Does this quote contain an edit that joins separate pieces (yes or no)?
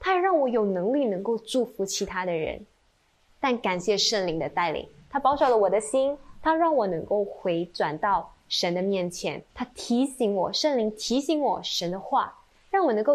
yes